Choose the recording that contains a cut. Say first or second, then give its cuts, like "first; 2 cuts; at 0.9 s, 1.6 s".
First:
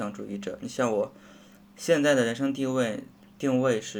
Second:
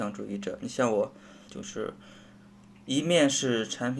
second; 1 cut; at 1.5 s